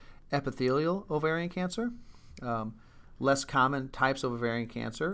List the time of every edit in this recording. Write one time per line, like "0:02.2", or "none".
none